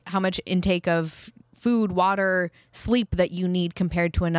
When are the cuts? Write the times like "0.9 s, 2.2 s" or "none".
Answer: none